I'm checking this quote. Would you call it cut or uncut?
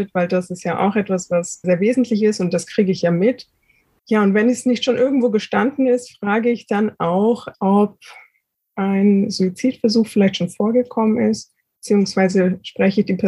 cut